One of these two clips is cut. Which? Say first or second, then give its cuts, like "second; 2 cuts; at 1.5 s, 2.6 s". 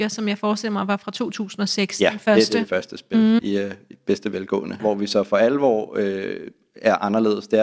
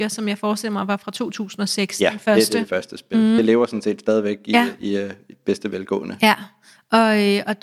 first; 2 cuts; at 3.4 s, 4.8 s